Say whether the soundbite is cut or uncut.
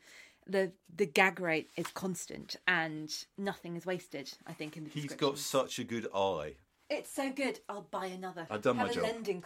cut